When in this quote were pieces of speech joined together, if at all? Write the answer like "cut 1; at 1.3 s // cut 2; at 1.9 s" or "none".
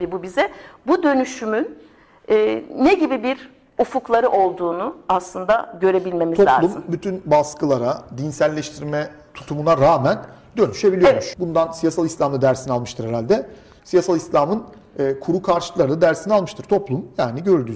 cut 1; at 11.3 s